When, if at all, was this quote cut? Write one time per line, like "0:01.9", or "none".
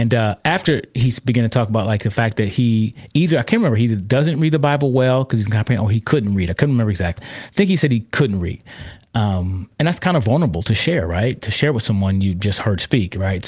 0:07.2